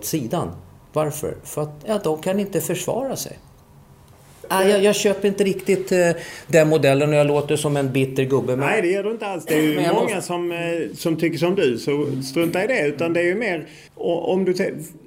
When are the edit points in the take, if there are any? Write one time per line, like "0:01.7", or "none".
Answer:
0:13.9